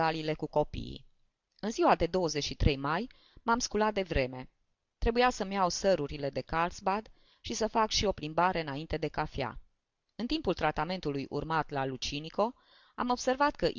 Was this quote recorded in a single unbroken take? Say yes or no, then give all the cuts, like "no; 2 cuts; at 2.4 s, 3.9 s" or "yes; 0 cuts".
yes; 0 cuts